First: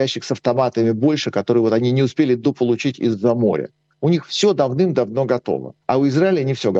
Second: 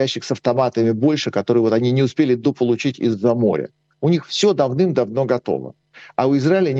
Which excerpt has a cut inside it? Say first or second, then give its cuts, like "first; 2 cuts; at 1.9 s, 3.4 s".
first; 1 cut; at 5.8 s